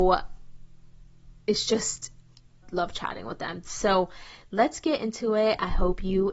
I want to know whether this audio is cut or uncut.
cut